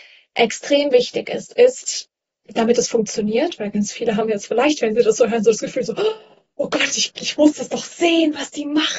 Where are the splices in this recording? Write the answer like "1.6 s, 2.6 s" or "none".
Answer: none